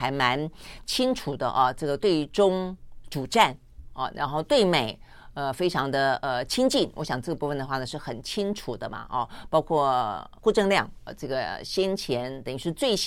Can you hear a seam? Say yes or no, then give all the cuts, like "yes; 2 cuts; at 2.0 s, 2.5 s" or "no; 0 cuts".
yes; 1 cut; at 10.4 s